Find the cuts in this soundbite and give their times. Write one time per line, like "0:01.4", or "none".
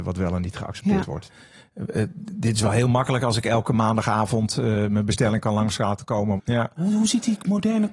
0:01.3
0:06.4